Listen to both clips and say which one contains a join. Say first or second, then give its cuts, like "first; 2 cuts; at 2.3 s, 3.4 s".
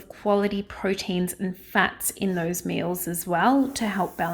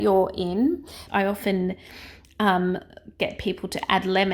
second; 1 cut; at 1.1 s